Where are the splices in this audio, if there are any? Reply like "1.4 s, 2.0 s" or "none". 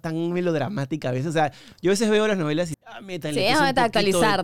2.7 s